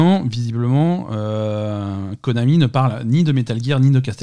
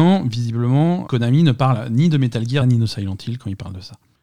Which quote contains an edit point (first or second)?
second